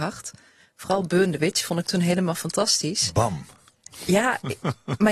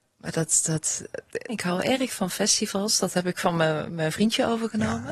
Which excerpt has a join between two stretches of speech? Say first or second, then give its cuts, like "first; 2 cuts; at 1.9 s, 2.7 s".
second; 1 cut; at 1.5 s